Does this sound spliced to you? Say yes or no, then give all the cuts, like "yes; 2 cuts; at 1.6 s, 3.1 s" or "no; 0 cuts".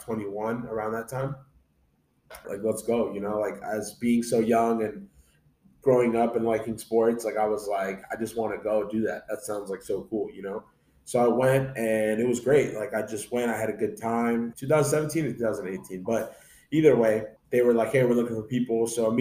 yes; 3 cuts; at 2.4 s, 14.5 s, 17.4 s